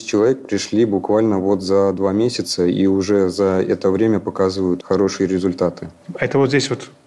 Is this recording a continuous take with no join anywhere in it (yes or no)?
no